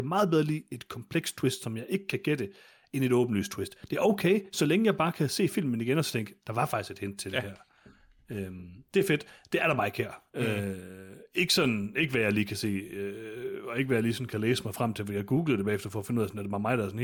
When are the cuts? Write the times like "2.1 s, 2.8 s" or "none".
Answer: none